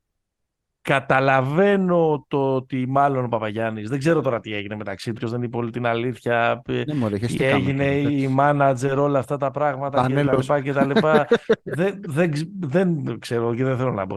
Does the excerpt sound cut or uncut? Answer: cut